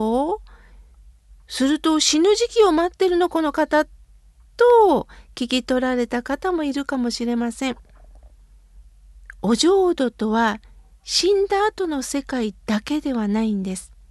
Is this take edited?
no; 0 cuts

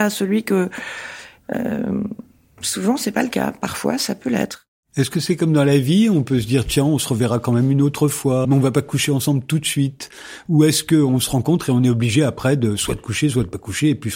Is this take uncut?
no; 2 cuts; at 1.4 s, 8.4 s

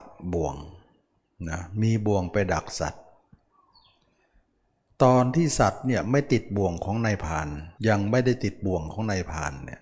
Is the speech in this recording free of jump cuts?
no; 1 cut; at 7.8 s

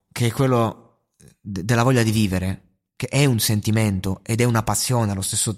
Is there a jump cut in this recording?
no; 0 cuts

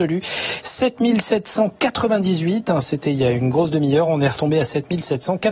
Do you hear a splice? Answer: no; 0 cuts

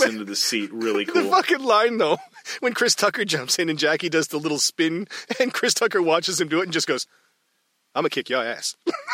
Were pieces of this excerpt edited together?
no; 0 cuts

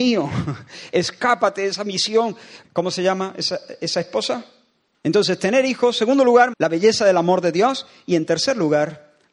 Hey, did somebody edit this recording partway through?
yes; 3 cuts; at 2.6 s, 4.9 s, 6.5 s

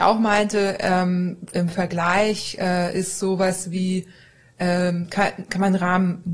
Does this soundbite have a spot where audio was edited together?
yes; 1 cut; at 1.5 s

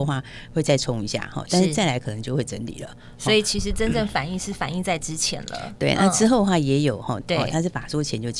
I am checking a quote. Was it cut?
yes; 1 cut; at 7.2 s

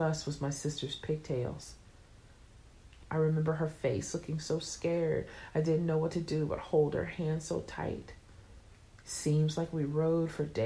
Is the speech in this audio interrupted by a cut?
yes; 1 cut; at 3.0 s

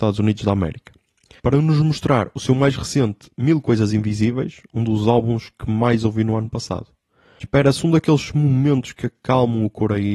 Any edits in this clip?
no; 0 cuts

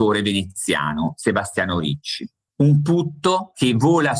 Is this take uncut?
no; 1 cut; at 2.5 s

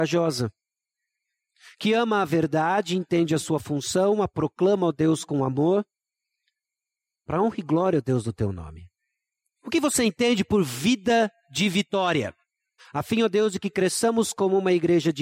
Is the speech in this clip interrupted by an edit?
yes; 2 cuts; at 9.6 s, 12.8 s

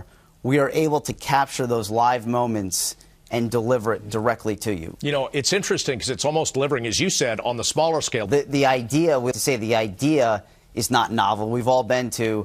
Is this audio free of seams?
no; 2 cuts; at 8.3 s, 9.3 s

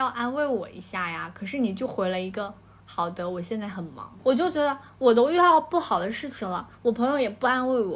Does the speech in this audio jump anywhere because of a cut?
no; 0 cuts

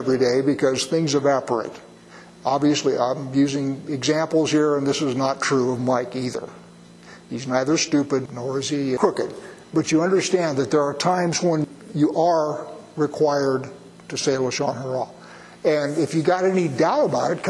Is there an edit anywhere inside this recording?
no; 0 cuts

